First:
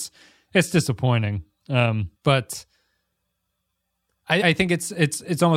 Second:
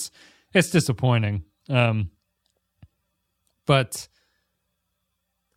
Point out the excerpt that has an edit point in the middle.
first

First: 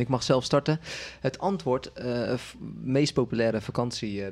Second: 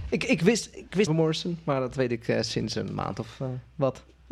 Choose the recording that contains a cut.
second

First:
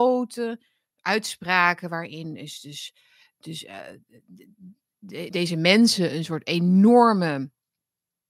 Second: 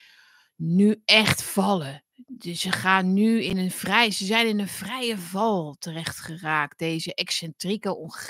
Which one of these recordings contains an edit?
first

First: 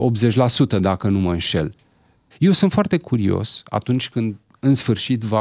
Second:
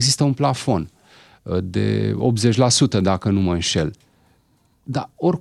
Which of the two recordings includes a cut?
first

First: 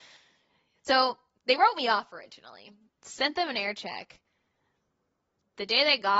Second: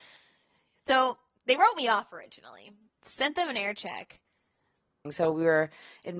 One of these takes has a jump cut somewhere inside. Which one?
second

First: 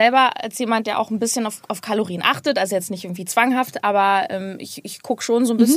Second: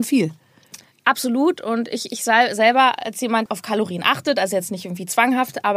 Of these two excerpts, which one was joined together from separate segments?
second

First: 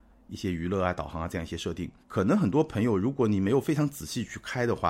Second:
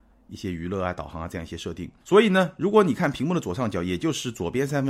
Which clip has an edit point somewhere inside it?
first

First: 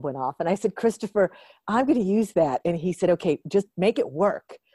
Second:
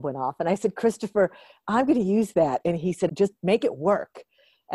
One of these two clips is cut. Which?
second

